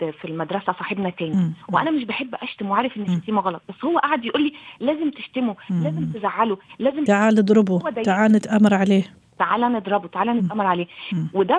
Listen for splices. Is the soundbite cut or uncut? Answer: uncut